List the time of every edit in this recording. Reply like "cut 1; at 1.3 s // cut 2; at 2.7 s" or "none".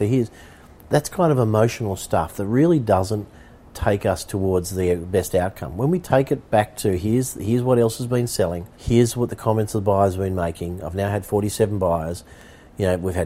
cut 1; at 8.7 s